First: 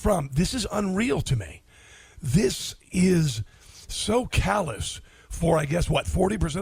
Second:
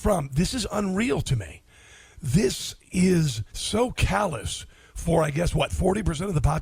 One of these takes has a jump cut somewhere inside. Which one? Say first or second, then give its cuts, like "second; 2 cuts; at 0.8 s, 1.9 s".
second; 1 cut; at 3.5 s